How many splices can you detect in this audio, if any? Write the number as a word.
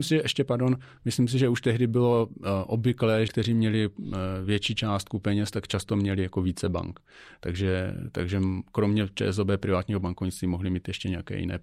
one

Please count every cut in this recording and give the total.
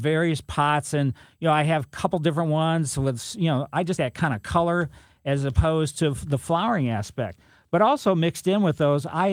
one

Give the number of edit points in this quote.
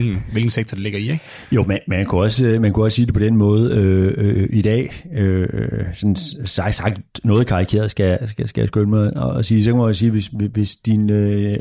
zero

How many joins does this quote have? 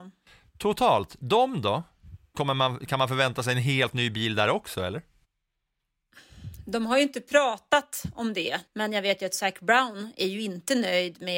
two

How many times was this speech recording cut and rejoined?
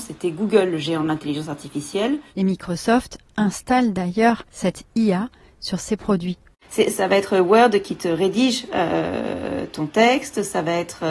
one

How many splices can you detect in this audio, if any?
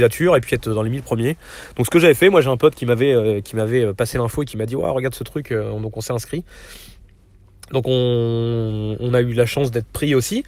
zero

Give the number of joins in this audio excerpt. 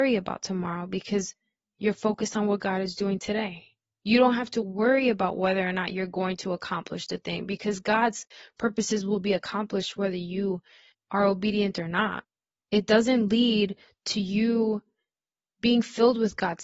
one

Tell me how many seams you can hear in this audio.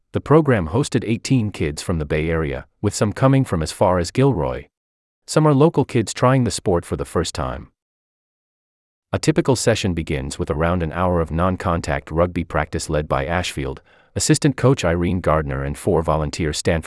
one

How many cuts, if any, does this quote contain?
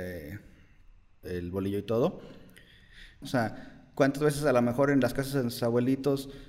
two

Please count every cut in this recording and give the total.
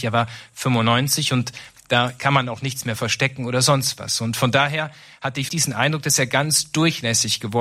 one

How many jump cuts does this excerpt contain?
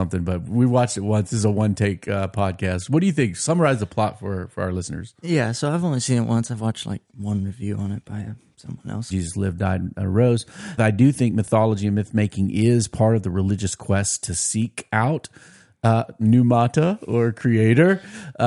two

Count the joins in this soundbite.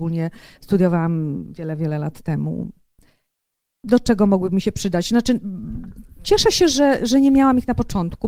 zero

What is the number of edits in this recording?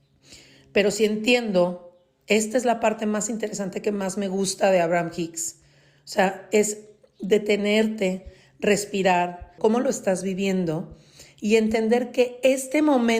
one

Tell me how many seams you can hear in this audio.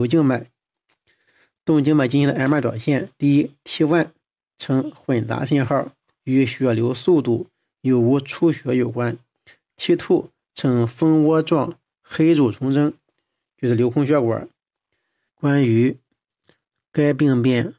one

